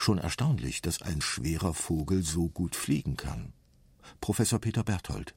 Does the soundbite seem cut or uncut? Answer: cut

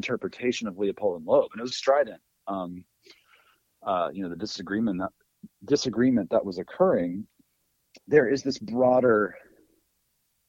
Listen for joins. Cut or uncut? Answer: cut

